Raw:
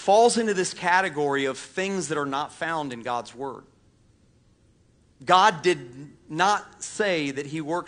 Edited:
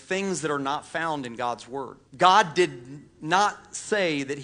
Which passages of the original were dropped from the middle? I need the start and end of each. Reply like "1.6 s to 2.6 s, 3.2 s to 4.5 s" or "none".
3.7 s to 5.1 s